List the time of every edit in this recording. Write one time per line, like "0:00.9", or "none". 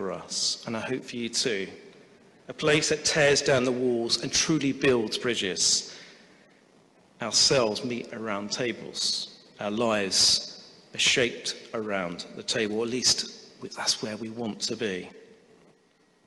none